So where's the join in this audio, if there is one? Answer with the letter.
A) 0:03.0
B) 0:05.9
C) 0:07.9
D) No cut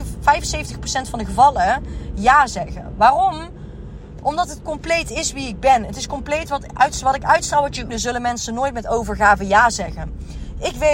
C